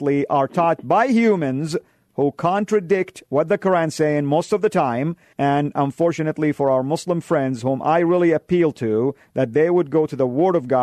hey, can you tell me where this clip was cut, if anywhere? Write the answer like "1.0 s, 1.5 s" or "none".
5.3 s